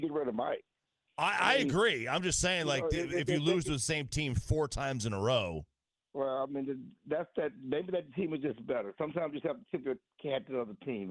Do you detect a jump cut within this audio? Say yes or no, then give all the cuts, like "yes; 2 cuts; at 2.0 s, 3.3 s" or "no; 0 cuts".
no; 0 cuts